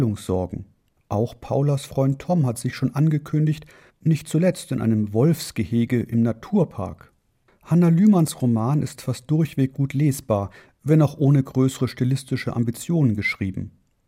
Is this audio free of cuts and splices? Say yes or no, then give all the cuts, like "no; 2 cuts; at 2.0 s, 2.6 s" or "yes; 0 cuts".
no; 1 cut; at 3.9 s